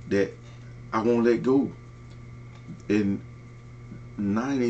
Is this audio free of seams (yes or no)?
no